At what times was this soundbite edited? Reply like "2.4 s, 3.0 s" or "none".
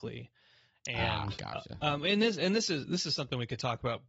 1.4 s